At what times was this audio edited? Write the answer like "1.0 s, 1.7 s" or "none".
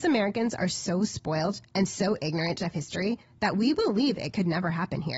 none